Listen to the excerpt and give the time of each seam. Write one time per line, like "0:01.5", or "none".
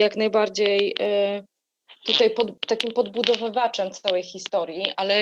none